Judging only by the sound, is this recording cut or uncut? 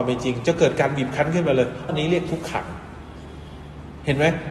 cut